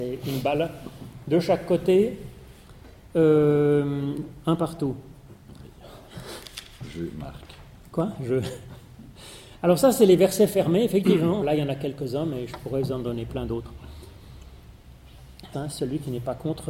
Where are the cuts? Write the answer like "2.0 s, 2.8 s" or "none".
11.4 s, 15.5 s